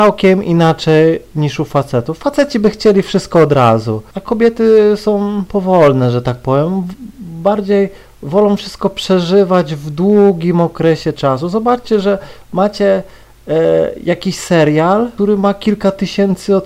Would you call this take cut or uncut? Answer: uncut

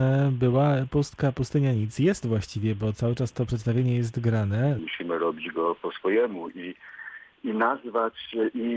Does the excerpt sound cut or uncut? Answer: cut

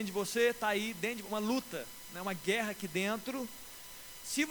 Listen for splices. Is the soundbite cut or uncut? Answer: uncut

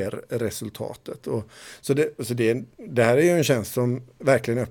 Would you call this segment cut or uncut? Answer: uncut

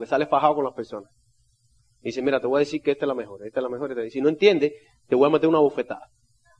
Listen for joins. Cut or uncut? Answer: uncut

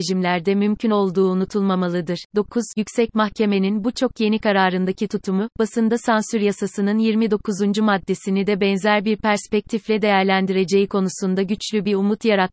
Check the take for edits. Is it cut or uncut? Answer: uncut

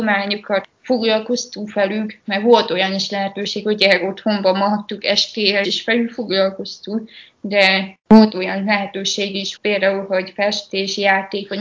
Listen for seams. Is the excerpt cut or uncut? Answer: cut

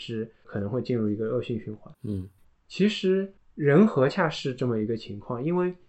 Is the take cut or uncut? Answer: cut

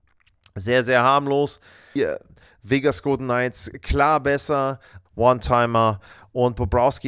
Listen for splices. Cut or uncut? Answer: cut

